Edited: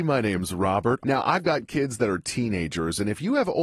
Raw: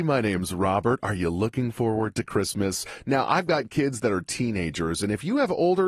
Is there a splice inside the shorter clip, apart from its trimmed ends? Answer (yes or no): yes